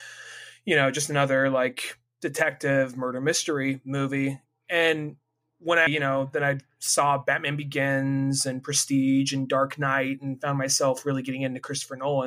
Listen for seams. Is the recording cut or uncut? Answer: cut